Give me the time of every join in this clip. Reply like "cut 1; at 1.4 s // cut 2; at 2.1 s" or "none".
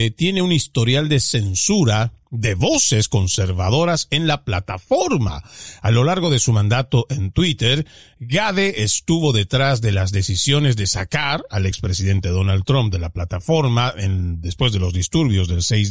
none